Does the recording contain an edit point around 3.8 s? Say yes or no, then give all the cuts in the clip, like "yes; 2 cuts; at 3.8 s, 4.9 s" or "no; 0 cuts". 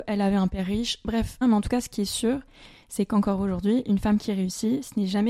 no; 1 cut; at 1.4 s